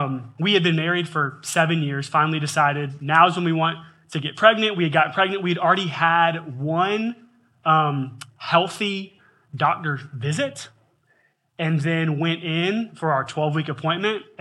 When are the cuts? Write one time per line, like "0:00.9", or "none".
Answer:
none

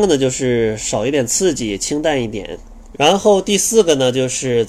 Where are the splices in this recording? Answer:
0:02.9

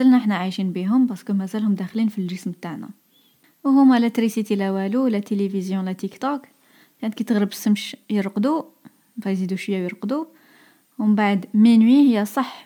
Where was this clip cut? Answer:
none

